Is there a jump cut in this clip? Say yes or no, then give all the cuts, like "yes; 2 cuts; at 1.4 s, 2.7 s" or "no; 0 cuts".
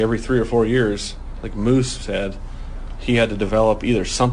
no; 0 cuts